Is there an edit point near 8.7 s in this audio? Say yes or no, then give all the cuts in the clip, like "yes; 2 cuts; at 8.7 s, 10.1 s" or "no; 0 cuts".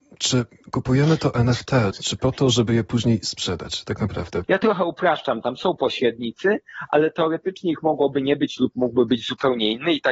no; 2 cuts; at 1.9 s, 4.4 s